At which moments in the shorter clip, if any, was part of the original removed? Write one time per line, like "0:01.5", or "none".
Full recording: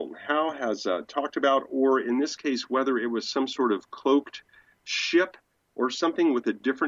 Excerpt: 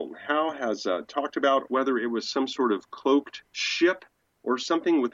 0:01.7
0:03.5